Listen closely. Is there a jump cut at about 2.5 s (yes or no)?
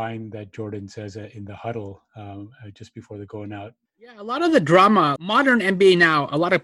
no